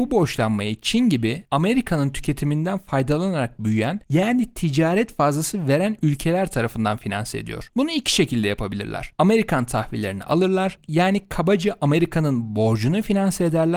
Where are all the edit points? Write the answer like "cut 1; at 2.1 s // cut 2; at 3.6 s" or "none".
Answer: none